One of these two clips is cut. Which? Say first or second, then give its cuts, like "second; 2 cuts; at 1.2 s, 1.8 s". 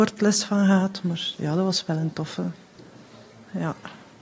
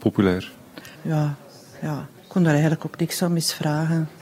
second; 2 cuts; at 0.9 s, 2.2 s